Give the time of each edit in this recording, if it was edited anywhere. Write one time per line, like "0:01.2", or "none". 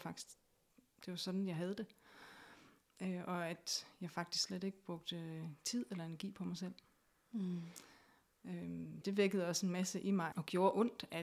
0:09.0
0:10.3